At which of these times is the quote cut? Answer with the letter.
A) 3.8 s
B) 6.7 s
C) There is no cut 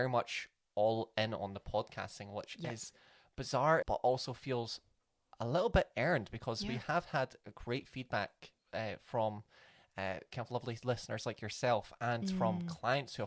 A